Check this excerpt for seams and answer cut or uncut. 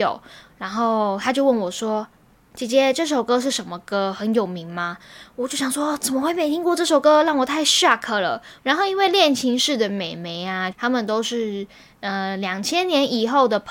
cut